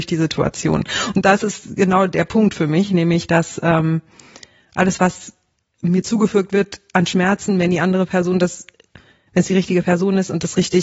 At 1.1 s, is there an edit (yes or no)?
no